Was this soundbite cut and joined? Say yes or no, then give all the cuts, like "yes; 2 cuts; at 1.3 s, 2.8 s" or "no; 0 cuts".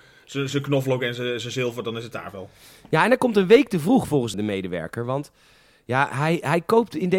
yes; 1 cut; at 4.3 s